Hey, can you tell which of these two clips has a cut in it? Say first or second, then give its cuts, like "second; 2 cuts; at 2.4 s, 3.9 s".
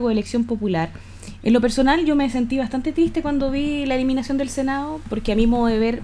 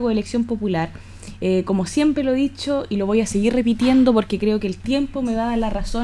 first; 1 cut; at 1.4 s